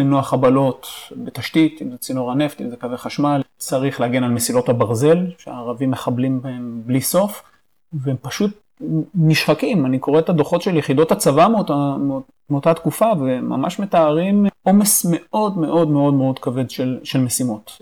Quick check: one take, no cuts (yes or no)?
yes